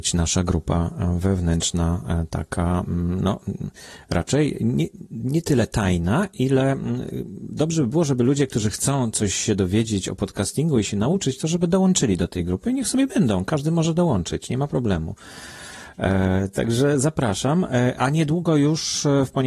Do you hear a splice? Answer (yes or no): no